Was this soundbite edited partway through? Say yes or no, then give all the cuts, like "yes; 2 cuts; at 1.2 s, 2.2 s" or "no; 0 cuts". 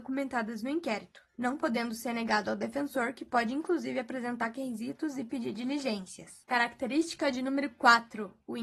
no; 0 cuts